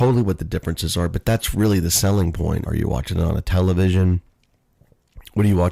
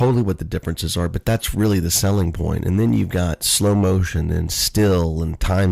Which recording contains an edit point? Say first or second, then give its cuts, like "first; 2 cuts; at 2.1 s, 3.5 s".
first; 1 cut; at 2.6 s